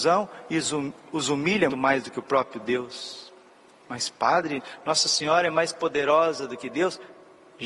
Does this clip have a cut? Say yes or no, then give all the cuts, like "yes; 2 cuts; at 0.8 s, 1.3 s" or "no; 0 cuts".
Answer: yes; 2 cuts; at 1.7 s, 3.8 s